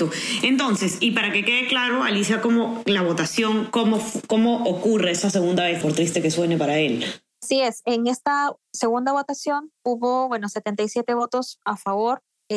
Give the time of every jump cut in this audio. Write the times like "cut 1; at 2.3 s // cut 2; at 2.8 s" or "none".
cut 1; at 5.8 s